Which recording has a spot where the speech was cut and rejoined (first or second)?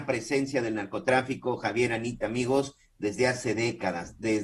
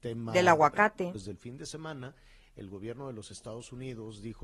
second